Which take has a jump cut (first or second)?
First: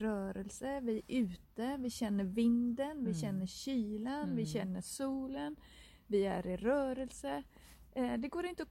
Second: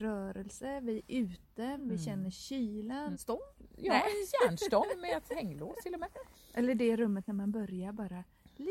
second